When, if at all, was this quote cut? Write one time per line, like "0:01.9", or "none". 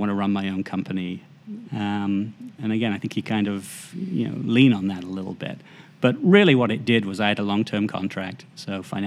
0:01.6